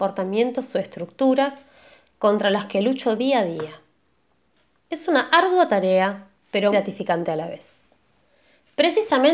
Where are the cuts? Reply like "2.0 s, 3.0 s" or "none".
4.8 s, 6.7 s